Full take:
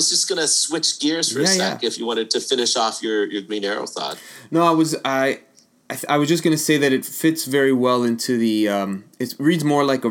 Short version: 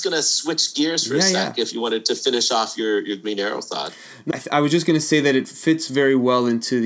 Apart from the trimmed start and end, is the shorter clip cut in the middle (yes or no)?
yes